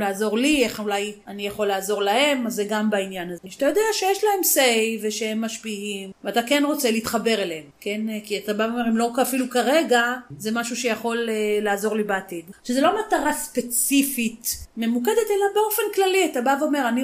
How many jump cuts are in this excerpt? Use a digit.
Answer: 2